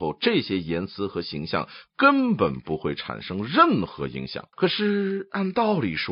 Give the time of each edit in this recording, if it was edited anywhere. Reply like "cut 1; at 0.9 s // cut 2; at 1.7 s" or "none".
cut 1; at 4.5 s